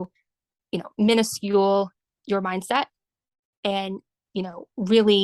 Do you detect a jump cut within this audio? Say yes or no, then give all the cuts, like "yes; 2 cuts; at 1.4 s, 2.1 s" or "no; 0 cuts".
no; 0 cuts